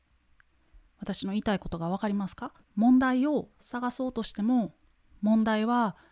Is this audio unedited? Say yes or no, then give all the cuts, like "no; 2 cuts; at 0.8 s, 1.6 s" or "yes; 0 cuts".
no; 1 cut; at 2.6 s